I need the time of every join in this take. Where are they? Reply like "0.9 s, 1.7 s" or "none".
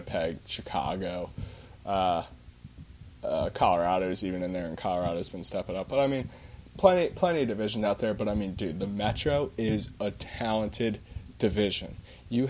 none